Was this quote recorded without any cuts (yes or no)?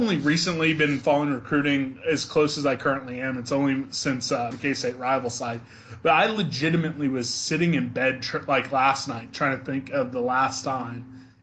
no